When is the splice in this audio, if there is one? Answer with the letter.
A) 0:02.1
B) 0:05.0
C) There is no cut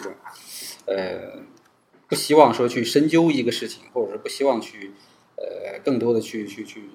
C